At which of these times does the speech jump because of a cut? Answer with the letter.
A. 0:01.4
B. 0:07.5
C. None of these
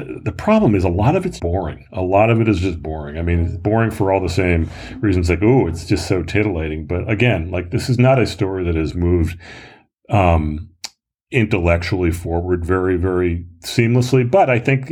A